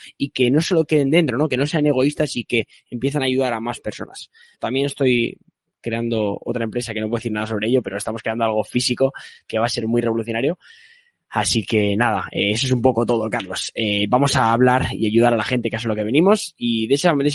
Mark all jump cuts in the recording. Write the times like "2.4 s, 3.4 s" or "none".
4.5 s